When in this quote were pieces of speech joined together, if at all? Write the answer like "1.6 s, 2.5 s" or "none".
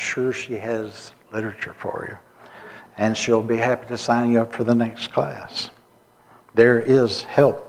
none

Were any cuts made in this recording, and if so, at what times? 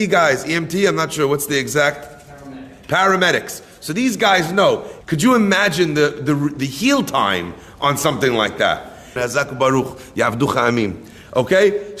5.0 s, 9.2 s

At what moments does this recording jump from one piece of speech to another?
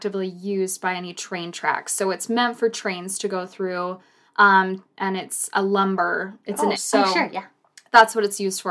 6.7 s

